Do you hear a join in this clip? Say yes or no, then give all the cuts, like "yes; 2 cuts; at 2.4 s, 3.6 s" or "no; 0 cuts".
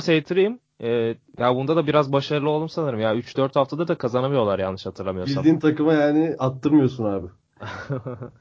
no; 0 cuts